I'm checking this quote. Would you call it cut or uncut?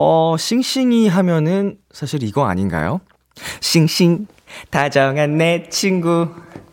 uncut